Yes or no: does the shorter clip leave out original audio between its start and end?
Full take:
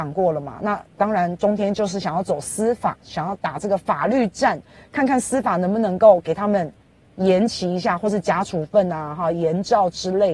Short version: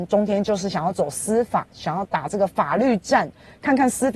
no